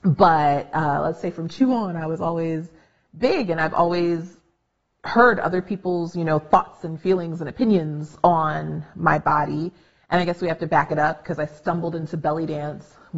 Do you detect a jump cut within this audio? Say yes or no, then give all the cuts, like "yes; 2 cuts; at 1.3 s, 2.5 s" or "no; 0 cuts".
no; 0 cuts